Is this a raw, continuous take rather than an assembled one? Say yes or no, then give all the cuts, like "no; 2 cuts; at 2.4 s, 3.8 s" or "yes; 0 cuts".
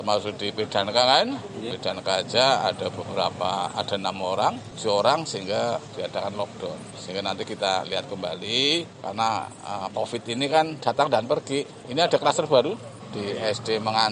yes; 0 cuts